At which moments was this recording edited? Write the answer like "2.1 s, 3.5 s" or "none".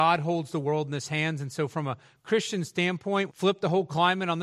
3.3 s